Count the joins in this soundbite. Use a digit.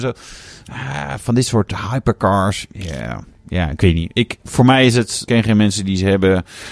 1